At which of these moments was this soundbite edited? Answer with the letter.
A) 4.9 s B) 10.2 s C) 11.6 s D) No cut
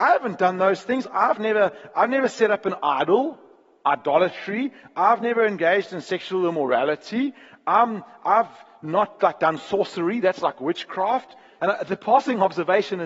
C